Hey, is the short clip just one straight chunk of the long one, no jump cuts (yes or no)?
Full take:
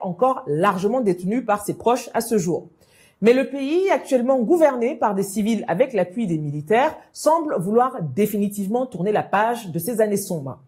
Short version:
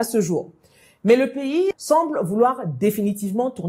no